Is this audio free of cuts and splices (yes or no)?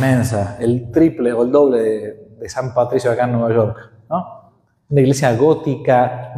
yes